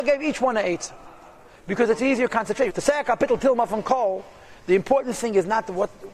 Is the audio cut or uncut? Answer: cut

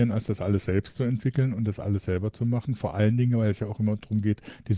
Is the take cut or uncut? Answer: uncut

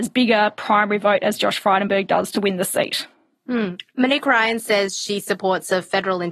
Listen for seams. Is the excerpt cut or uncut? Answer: uncut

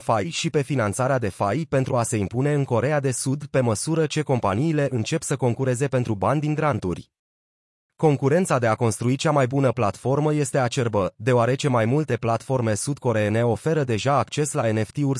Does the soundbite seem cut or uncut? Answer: uncut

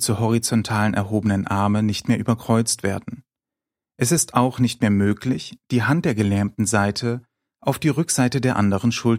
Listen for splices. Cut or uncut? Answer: uncut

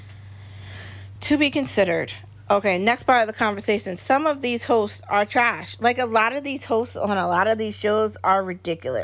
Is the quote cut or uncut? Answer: uncut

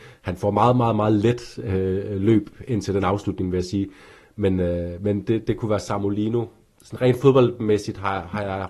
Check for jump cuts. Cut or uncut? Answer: uncut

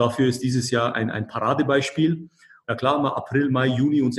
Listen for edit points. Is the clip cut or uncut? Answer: cut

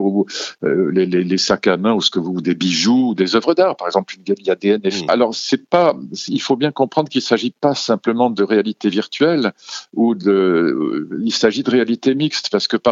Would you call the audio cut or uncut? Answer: cut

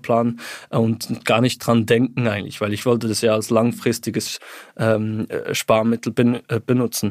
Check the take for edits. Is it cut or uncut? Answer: uncut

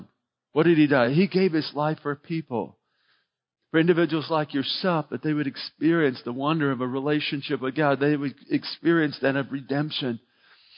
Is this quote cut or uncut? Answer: uncut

